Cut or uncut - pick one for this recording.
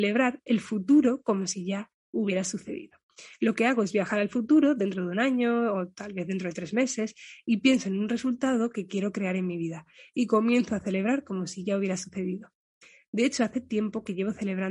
uncut